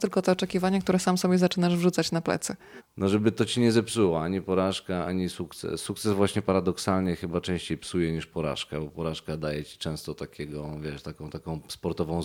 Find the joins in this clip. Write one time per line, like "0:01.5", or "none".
0:02.8